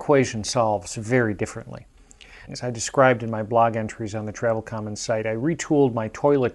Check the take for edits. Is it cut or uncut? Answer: cut